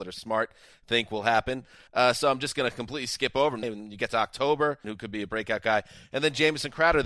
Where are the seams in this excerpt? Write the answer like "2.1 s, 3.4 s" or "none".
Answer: 1.9 s, 3.6 s, 4.8 s